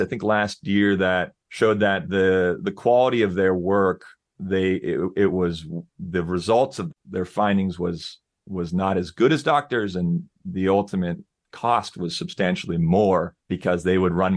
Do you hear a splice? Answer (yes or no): no